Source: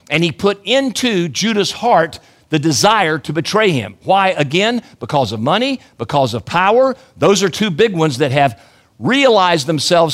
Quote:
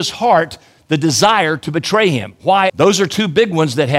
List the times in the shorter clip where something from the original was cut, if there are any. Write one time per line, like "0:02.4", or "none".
0:02.7